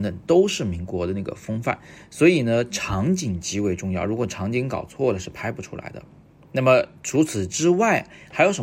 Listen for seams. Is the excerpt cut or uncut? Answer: uncut